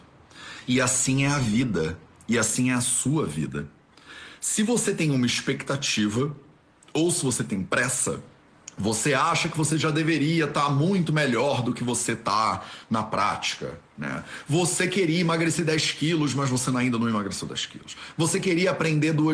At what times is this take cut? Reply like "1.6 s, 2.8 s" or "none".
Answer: none